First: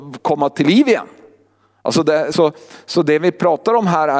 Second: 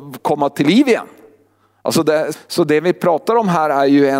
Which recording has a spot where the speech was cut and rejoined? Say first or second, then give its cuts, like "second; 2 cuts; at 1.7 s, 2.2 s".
second; 1 cut; at 2.3 s